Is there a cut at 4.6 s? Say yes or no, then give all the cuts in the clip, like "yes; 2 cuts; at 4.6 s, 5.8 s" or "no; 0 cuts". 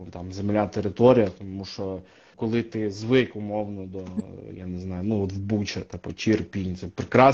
no; 1 cut; at 2.3 s